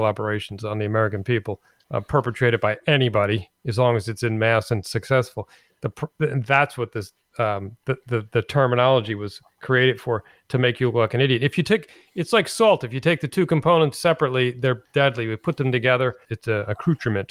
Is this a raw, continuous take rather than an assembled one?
no; 1 cut; at 16.3 s

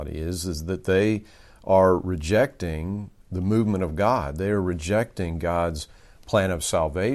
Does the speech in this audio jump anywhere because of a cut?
no; 0 cuts

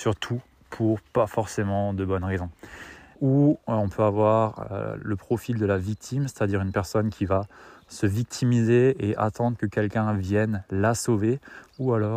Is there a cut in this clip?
yes; 1 cut; at 3.1 s

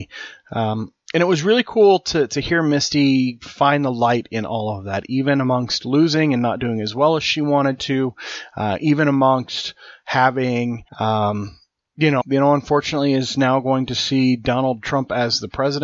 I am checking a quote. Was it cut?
yes; 2 cuts; at 10.9 s, 12.2 s

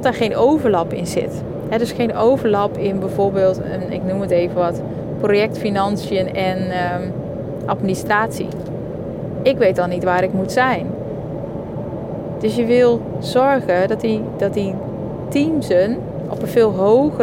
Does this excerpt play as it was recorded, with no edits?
no; 2 cuts; at 9.4 s, 14.4 s

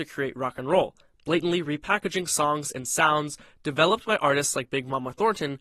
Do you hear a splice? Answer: no; 0 cuts

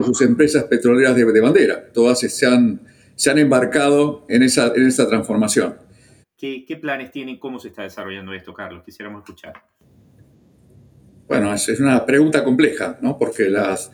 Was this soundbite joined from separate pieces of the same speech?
yes; 2 cuts; at 4.3 s, 6.2 s

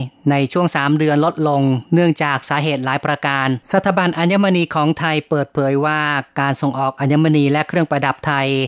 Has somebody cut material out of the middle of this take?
yes; 1 cut; at 3.6 s

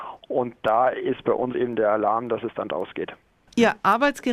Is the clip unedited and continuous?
yes; 0 cuts

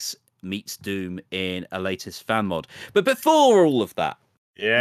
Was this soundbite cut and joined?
no; 0 cuts

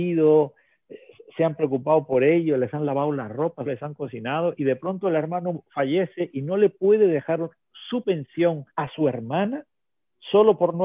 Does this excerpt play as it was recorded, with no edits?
no; 2 cuts; at 3.7 s, 8.7 s

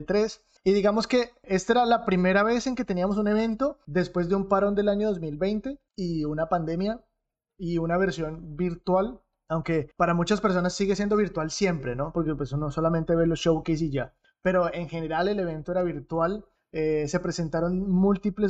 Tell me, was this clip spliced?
no; 0 cuts

